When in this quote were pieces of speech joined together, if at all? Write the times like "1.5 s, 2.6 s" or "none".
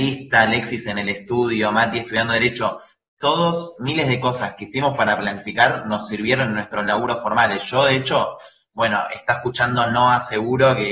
none